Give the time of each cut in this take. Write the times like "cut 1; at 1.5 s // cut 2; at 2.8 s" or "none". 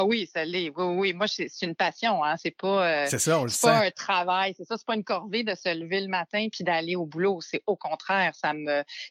none